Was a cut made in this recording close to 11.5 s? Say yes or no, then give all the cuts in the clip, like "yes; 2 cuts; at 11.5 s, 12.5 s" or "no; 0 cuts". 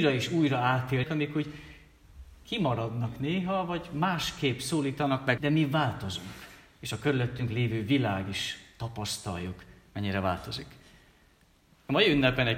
no; 2 cuts; at 1.0 s, 5.4 s